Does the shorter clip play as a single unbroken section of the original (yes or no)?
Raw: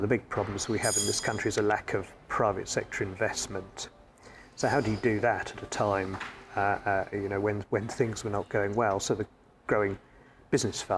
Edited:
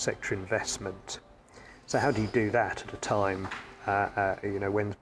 yes